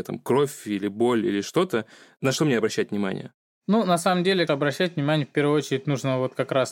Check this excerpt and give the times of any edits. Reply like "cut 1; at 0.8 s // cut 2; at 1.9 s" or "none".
cut 1; at 4.5 s